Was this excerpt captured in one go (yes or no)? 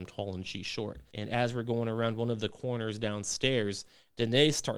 no